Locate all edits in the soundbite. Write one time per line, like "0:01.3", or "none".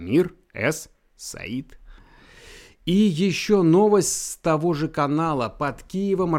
none